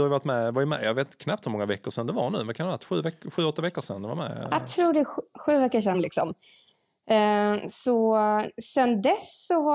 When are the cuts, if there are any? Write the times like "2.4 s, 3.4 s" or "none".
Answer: 5.9 s